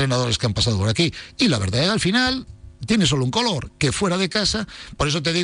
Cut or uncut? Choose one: uncut